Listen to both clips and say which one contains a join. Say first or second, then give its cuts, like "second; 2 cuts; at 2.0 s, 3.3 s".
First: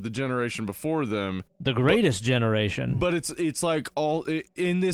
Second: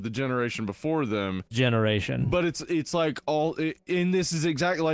second; 1 cut; at 1.5 s